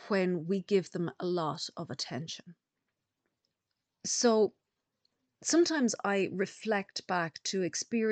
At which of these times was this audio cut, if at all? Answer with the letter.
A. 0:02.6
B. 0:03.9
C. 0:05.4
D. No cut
D